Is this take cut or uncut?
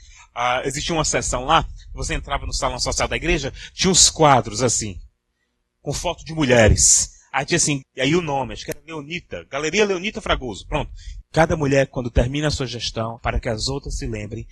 cut